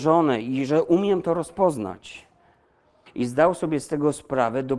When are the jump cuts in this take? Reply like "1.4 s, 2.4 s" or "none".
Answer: 3.1 s